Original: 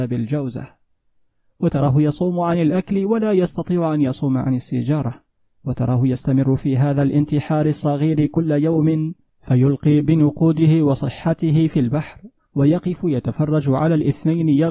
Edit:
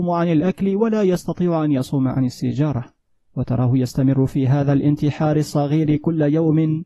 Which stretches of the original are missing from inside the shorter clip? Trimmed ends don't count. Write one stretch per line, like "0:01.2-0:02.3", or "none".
none